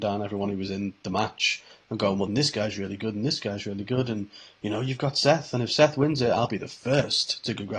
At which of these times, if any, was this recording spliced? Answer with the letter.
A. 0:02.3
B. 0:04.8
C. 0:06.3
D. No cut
A